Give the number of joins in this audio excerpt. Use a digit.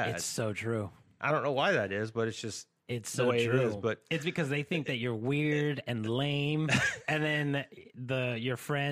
0